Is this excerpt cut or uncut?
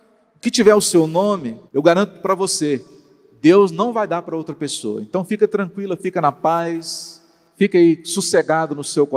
cut